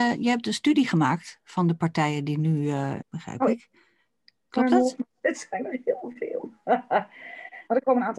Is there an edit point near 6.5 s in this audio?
no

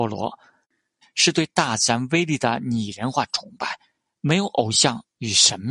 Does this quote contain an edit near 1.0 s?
yes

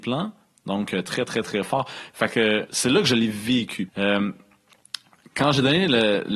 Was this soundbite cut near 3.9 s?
yes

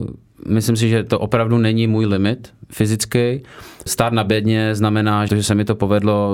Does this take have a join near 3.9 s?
yes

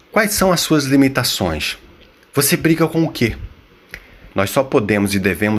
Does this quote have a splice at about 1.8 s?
no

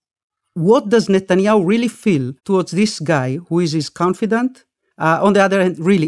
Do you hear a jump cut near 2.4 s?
yes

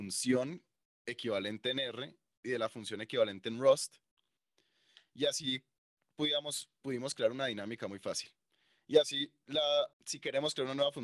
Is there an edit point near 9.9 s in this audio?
yes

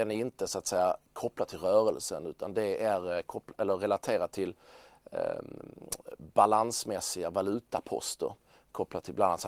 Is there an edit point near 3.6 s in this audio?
no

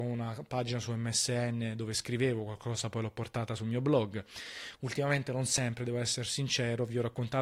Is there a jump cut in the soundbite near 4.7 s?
yes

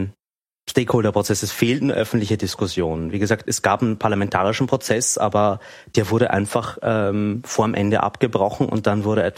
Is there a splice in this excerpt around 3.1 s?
no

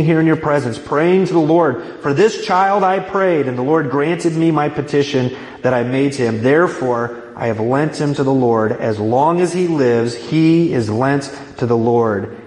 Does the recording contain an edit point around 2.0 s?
no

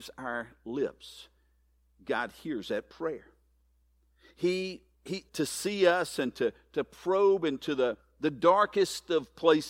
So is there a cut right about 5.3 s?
yes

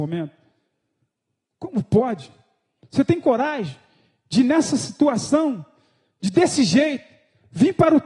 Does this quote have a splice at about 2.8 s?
yes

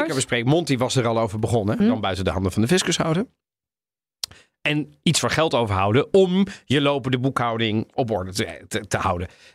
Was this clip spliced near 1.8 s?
yes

